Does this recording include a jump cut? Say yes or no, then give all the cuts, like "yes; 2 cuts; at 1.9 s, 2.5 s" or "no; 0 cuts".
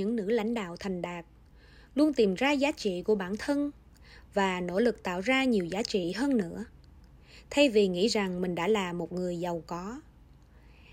no; 0 cuts